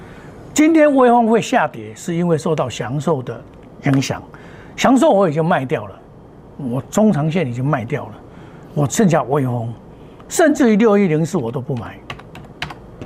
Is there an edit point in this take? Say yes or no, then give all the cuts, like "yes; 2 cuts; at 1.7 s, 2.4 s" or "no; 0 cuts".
no; 0 cuts